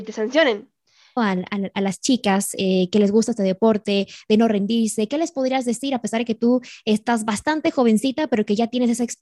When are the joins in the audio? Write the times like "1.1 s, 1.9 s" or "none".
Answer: 1.2 s